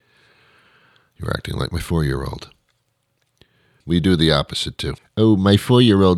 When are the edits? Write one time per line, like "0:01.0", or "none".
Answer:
0:03.8
0:05.0